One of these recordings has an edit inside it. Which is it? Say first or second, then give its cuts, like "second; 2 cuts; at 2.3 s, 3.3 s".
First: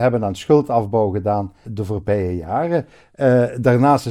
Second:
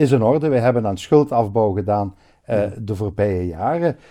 first; 1 cut; at 1.6 s